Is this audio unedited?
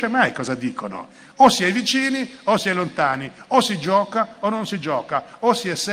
yes; 0 cuts

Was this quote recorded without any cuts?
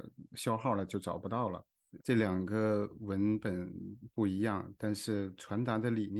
no; 1 cut; at 2.0 s

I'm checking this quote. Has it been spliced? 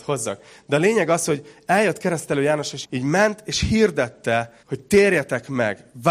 yes; 2 cuts; at 2.8 s, 4.6 s

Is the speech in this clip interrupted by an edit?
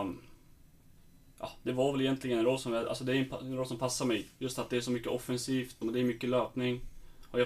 yes; 1 cut; at 5.8 s

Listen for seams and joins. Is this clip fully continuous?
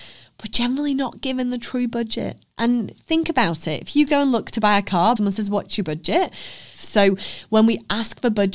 no; 2 cuts; at 5.2 s, 6.7 s

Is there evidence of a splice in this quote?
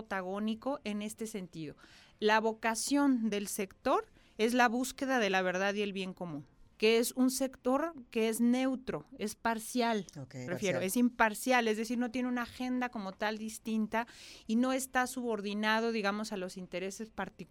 yes; 2 cuts; at 6.7 s, 10.5 s

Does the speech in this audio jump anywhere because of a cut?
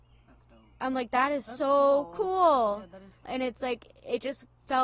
yes; 1 cut; at 3.3 s

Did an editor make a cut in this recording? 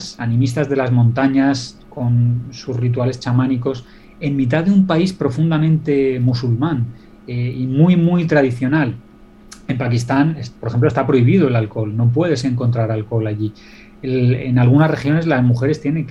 no; 0 cuts

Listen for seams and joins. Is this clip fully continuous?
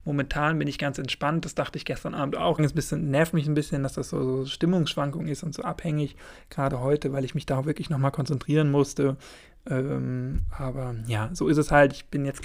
no; 1 cut; at 2.6 s

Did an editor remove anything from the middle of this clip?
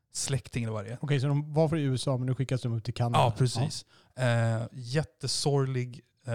no; 0 cuts

